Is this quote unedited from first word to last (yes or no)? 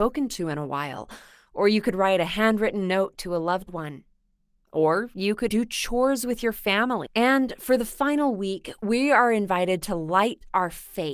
no